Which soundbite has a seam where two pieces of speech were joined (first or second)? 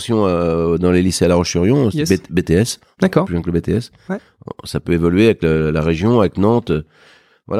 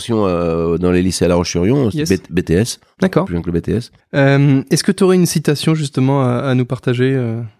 second